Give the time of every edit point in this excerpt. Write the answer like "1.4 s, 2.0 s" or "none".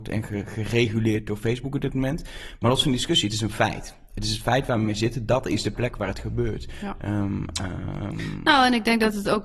none